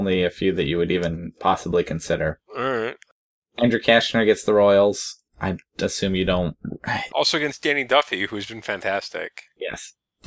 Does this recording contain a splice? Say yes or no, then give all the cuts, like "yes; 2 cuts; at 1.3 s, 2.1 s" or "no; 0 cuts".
yes; 2 cuts; at 2.5 s, 7.1 s